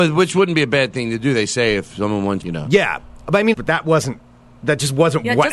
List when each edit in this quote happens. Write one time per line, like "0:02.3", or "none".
0:02.4
0:03.5